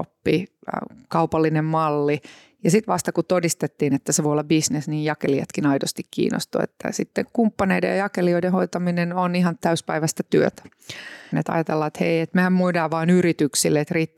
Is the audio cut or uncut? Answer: cut